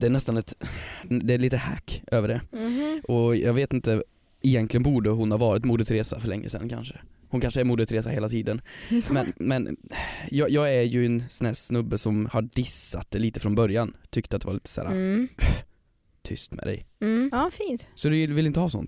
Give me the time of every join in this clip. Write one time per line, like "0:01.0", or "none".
0:01.1
0:17.3